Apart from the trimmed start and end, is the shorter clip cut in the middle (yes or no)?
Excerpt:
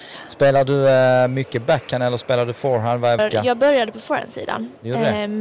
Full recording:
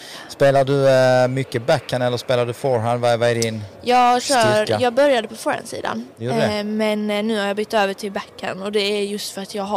yes